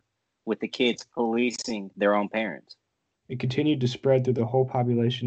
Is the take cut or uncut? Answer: cut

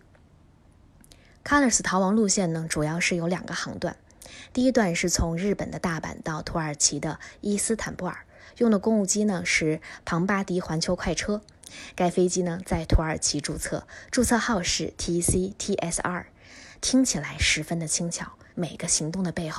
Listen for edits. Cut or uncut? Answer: cut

